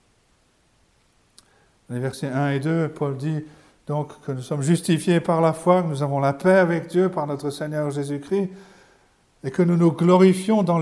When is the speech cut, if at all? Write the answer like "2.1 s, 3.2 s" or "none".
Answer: none